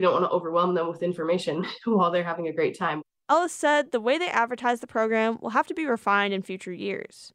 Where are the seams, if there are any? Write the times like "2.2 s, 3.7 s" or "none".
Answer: none